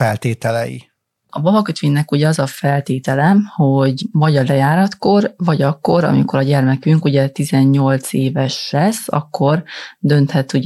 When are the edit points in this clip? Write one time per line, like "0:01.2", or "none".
none